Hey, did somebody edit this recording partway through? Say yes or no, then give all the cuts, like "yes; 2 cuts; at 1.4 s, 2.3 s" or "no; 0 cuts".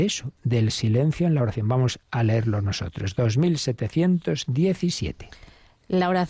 no; 0 cuts